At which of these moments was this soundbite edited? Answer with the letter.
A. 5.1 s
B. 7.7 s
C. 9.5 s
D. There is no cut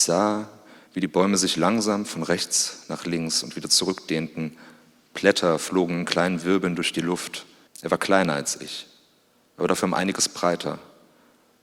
B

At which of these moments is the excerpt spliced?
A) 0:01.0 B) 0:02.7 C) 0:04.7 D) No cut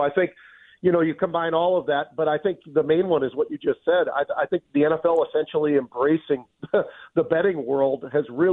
C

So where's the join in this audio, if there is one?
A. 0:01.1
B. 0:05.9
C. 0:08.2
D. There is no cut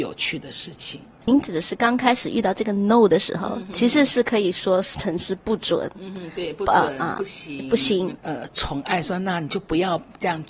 C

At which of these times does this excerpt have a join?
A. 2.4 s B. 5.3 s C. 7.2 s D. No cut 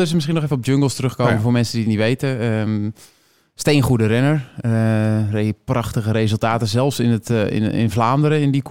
D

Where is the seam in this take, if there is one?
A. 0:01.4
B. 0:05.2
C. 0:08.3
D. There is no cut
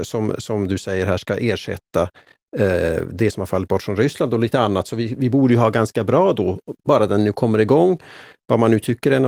D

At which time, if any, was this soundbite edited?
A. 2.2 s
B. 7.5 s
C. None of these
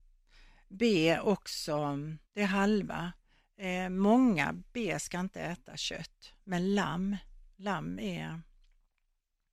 A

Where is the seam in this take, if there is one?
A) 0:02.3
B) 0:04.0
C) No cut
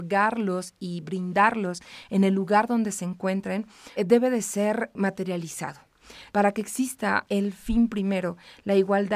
B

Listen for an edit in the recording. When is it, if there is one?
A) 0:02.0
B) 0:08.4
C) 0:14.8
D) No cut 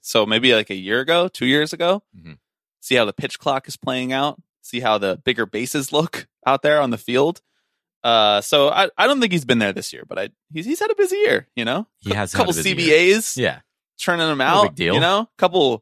D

